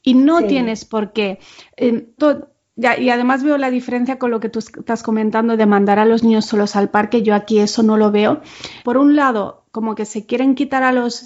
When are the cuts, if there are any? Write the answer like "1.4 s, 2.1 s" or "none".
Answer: 2.2 s, 8.8 s